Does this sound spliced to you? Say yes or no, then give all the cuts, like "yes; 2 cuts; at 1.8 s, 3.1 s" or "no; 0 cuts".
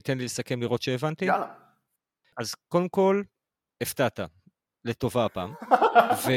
no; 0 cuts